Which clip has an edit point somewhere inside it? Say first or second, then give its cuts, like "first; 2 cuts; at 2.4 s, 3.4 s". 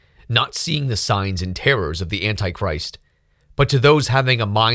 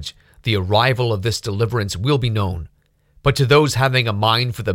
first; 1 cut; at 3.4 s